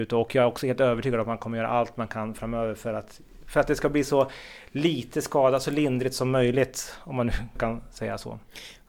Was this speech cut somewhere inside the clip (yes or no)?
yes